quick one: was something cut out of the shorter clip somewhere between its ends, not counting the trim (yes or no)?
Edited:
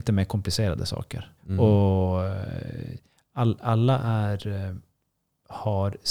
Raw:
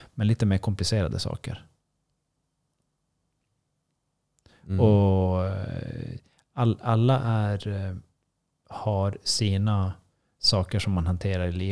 yes